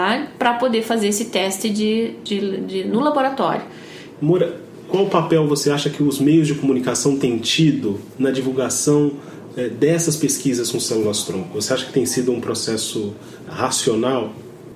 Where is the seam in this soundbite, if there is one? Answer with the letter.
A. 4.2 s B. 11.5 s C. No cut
A